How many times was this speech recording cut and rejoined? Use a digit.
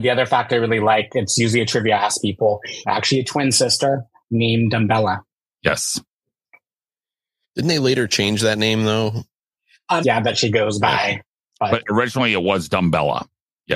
2